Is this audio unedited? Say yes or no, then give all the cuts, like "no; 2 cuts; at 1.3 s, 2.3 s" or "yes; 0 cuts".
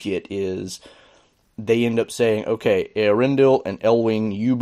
yes; 0 cuts